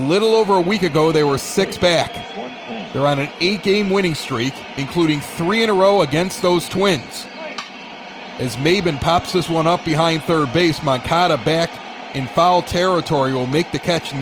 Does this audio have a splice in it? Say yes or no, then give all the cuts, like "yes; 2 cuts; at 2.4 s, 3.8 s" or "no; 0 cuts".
no; 0 cuts